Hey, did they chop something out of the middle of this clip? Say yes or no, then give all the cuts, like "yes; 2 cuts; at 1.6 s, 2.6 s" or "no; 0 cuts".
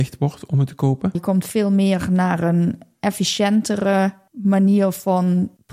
yes; 1 cut; at 1.1 s